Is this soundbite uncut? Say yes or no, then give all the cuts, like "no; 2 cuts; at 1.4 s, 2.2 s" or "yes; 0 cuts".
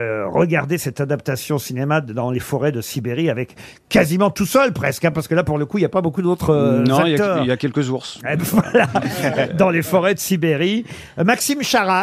yes; 0 cuts